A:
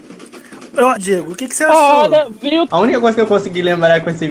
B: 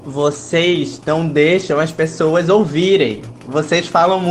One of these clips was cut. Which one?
A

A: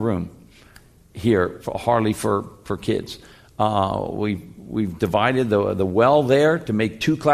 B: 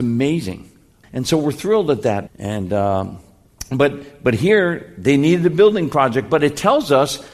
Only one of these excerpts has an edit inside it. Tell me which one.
B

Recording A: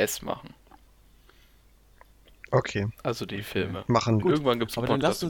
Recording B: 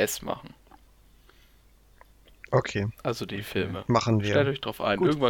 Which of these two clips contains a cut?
A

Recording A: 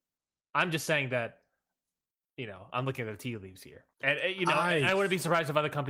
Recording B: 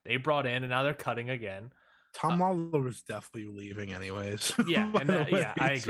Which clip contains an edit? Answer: A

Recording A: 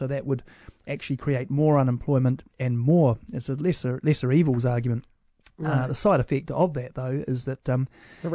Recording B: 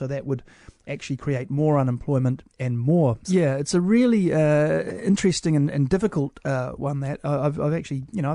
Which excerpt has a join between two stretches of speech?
B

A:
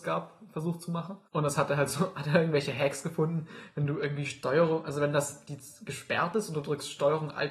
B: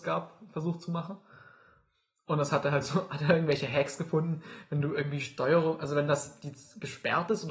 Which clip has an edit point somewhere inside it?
A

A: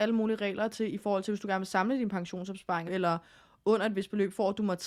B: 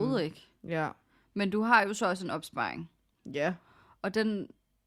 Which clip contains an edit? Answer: A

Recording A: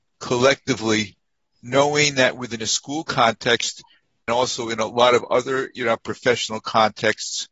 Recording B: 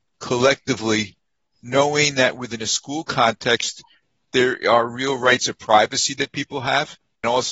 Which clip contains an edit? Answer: A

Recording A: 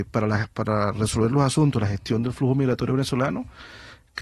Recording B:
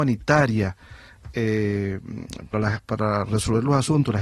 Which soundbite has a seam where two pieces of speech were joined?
B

